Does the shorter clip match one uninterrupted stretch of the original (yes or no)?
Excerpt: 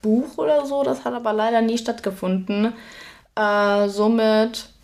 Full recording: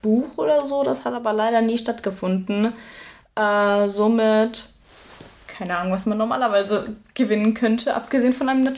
yes